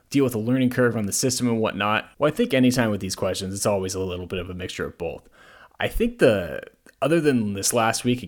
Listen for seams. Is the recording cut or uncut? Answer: cut